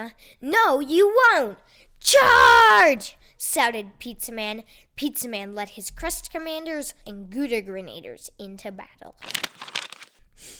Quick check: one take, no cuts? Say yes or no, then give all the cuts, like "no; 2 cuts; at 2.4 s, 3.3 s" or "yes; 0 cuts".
no; 1 cut; at 7.0 s